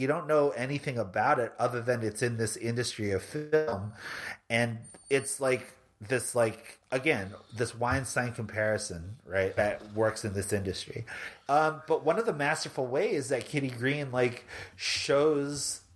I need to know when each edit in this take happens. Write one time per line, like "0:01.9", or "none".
0:09.6

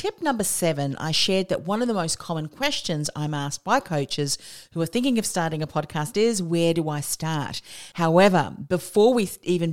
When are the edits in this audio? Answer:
0:07.9

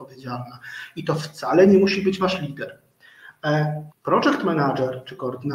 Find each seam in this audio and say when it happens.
0:03.9

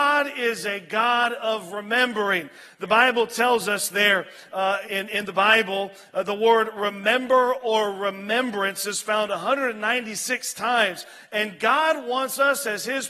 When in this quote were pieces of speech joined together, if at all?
0:04.8

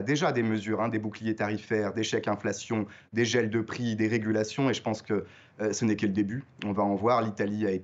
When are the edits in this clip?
none

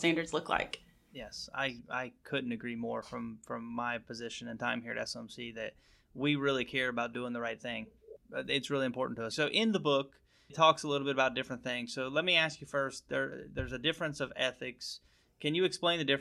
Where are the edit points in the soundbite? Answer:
0:09.3

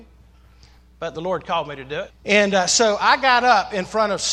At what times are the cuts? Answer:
0:02.1

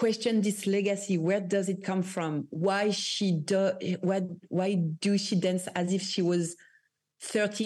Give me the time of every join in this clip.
none

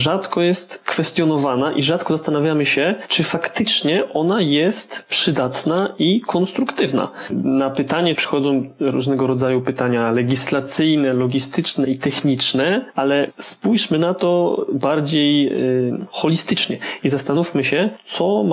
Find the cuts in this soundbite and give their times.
0:08.2

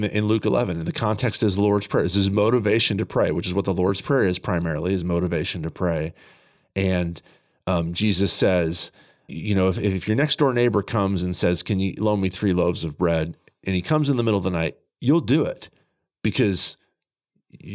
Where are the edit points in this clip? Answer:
0:09.3

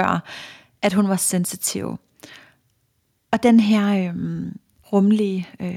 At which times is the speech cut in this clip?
0:03.2
0:04.8

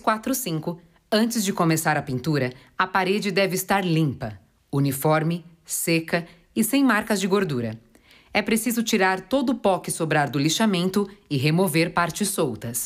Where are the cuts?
none

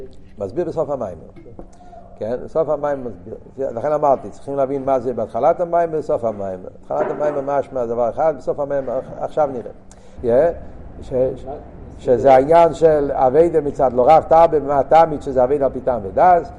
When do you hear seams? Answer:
0:10.2

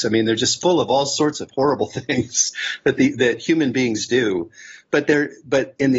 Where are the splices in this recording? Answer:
none

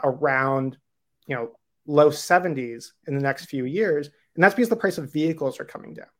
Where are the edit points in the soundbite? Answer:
none

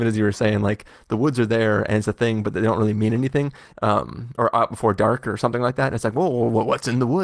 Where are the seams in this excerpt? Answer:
0:03.7

